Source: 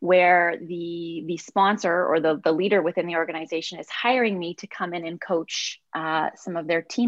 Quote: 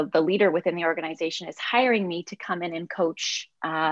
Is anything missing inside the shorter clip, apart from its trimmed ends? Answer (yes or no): no